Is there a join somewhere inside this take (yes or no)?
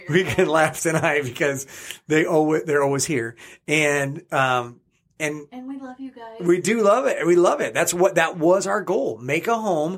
no